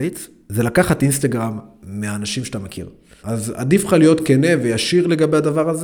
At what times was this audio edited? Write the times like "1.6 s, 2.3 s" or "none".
3.2 s